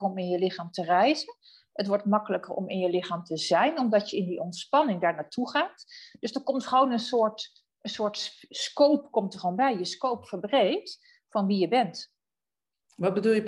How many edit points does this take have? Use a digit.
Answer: 0